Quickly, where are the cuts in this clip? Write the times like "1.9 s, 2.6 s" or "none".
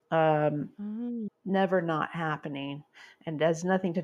1.3 s